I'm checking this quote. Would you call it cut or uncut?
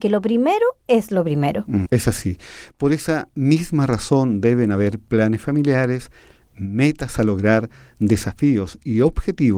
cut